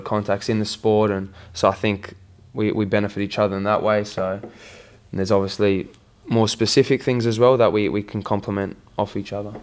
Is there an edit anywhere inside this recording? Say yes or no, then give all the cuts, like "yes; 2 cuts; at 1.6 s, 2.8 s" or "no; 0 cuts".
no; 0 cuts